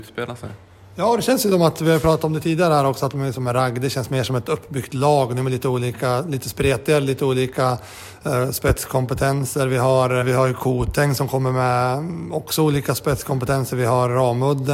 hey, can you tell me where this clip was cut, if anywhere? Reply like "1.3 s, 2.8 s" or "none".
10.2 s